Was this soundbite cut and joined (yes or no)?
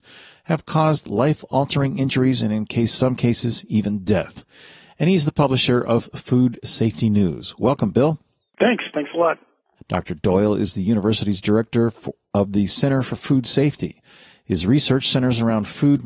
yes